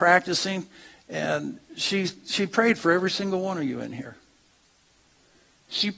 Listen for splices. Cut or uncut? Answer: uncut